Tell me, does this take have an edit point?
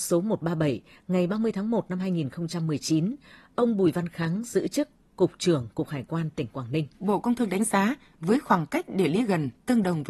yes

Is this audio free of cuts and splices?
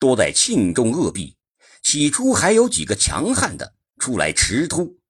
yes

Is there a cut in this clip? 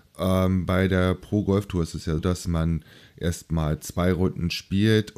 yes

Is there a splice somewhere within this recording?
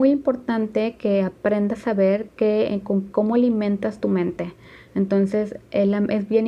no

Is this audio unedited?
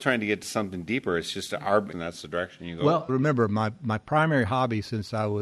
no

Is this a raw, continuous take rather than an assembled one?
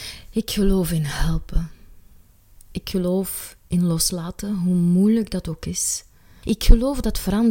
no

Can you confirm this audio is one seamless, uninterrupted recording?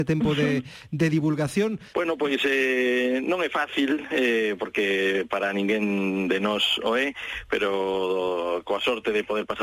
no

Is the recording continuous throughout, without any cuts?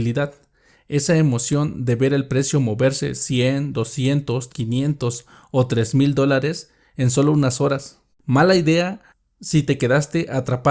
no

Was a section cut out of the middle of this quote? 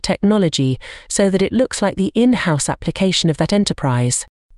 no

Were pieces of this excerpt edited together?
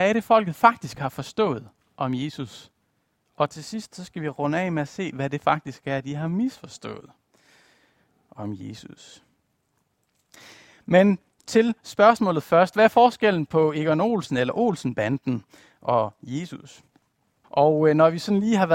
yes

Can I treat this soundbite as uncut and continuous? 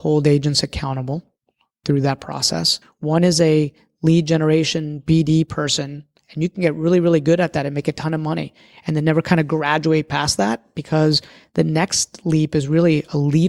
no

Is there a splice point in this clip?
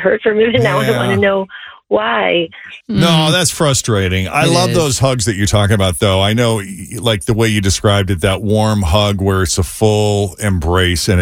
yes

